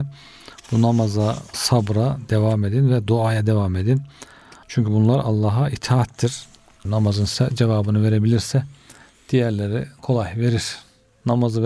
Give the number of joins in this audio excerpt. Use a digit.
3